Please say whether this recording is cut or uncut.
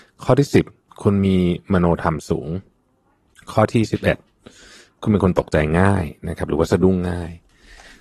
uncut